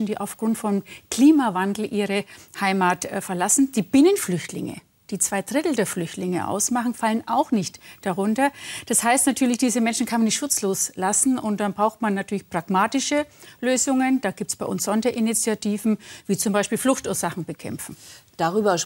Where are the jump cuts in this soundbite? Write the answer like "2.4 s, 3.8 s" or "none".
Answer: none